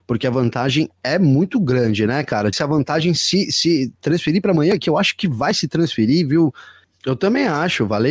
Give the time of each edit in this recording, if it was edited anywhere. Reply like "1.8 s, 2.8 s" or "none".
2.5 s, 6.8 s